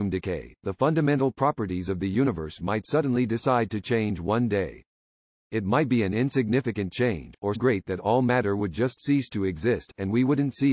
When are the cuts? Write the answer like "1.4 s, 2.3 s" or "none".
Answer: 7.5 s